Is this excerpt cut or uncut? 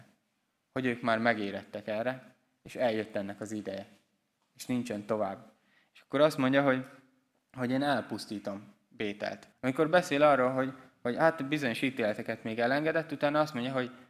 cut